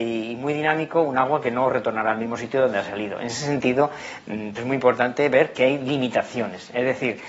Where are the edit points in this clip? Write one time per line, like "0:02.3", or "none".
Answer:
0:04.5